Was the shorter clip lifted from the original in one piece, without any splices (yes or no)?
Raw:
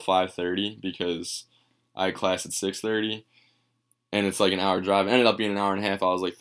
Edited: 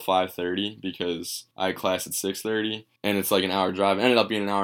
no